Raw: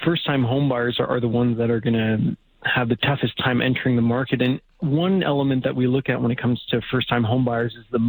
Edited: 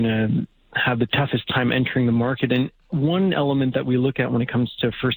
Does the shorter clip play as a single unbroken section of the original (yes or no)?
yes